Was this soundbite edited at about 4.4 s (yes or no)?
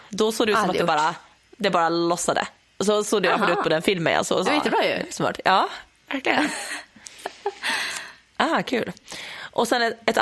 yes